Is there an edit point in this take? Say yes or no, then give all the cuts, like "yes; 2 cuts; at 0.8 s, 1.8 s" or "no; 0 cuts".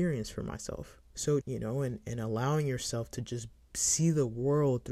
yes; 1 cut; at 1.4 s